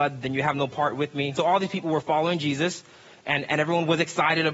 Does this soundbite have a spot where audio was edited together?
yes; 1 cut; at 1.3 s

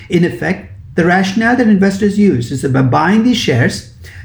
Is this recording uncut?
yes; 0 cuts

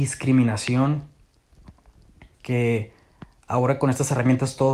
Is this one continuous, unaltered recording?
no; 1 cut; at 2.3 s

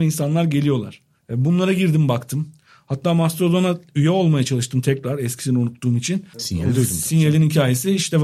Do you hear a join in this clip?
yes; 1 cut; at 6.3 s

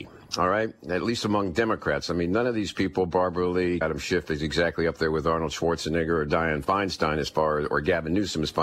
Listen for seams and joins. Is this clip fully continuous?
no; 1 cut; at 3.8 s

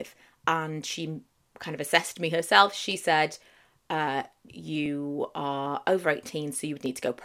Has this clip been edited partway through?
yes; 1 cut; at 4.5 s

